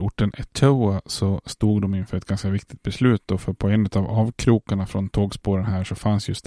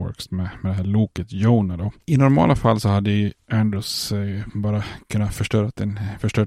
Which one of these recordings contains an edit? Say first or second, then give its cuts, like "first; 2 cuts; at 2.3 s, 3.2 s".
second; 1 cut; at 2.0 s